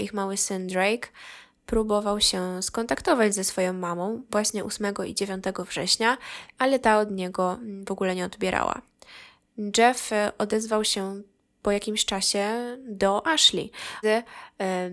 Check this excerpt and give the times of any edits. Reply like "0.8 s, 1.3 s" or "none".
14.0 s